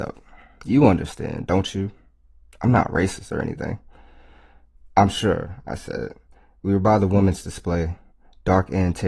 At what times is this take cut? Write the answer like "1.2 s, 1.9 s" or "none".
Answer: none

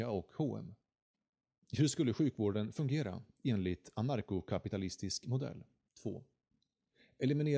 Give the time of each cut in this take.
5.9 s

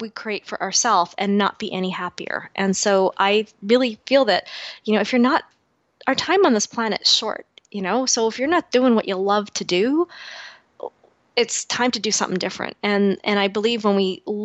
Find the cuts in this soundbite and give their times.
none

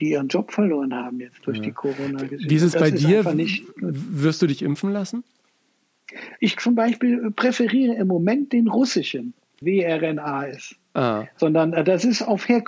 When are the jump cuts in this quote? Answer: 6.4 s, 9.6 s

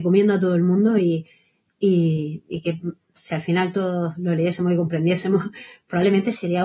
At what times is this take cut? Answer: none

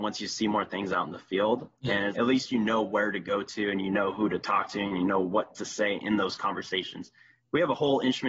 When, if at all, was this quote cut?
2.1 s

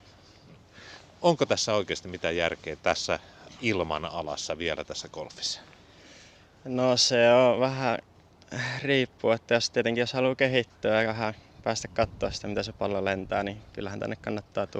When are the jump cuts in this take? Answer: none

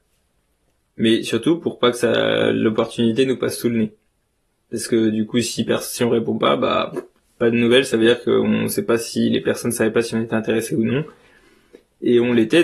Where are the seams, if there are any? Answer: 0.9 s

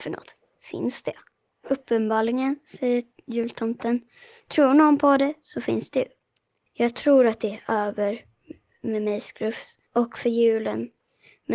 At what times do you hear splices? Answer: 6.7 s, 9.9 s

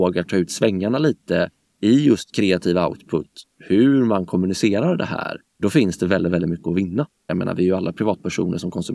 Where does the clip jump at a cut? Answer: 7.3 s

